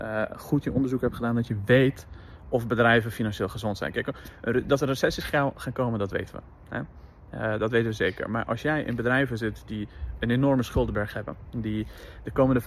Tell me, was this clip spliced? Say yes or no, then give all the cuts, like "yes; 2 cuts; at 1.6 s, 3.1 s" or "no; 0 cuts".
no; 0 cuts